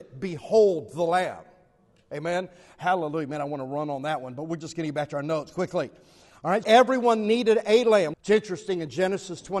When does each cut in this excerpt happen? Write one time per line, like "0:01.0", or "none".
0:06.6
0:08.1

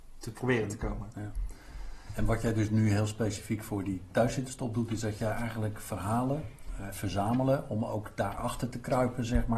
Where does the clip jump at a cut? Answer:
0:06.9

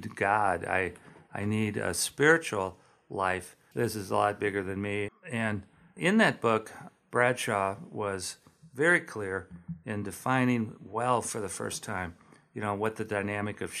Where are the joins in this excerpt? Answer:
0:03.7
0:05.1

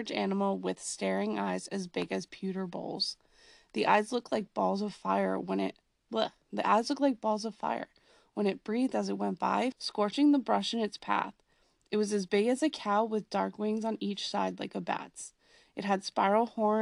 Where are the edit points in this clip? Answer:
0:09.7

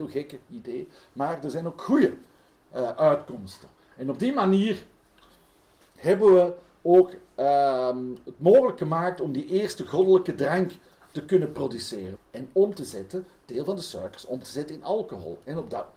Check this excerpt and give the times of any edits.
0:12.1

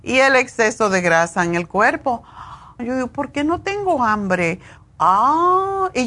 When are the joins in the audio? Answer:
0:02.8
0:04.8

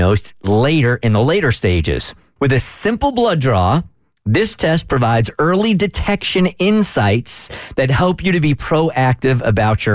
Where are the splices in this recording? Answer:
0:02.4

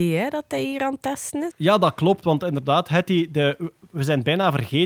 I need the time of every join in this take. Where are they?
0:01.5

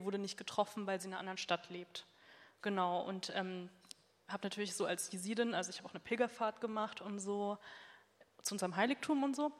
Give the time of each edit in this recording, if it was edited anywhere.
none

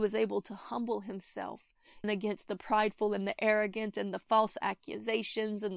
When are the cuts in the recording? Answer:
0:02.0

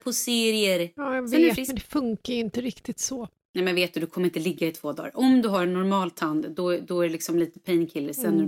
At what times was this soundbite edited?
none

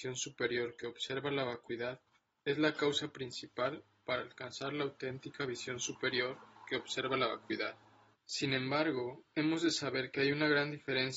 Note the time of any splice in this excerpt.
0:08.1

